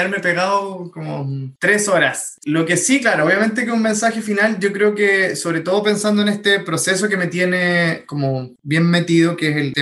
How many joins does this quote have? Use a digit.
0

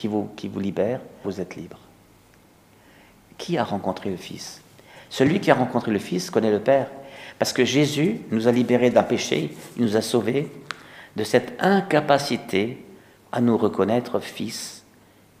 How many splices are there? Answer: 1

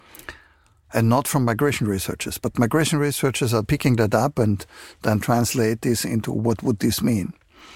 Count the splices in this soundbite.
1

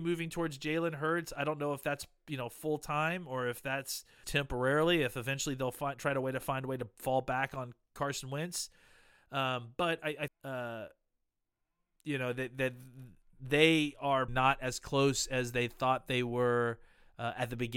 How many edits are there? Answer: 3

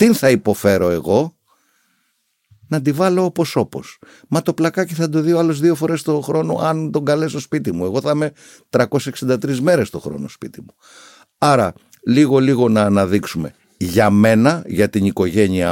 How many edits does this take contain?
0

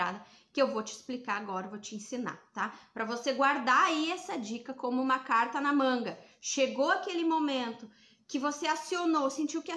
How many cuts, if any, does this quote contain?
0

